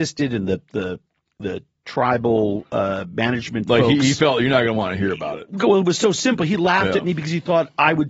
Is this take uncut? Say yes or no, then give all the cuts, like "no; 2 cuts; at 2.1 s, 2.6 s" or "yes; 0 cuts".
yes; 0 cuts